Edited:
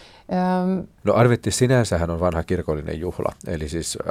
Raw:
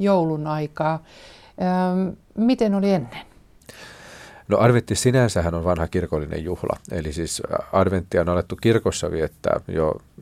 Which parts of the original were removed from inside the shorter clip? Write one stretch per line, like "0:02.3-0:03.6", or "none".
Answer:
0:02.3-0:04.4